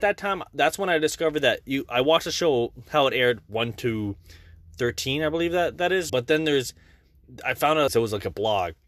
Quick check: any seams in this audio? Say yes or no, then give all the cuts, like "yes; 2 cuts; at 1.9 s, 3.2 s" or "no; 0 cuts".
yes; 2 cuts; at 6.1 s, 7.9 s